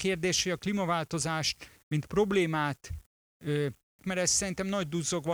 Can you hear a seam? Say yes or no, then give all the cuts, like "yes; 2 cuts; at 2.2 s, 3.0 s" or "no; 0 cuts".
yes; 1 cut; at 4.0 s